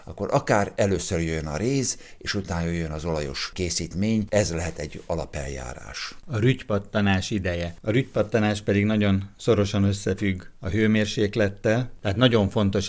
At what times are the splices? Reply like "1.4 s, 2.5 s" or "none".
none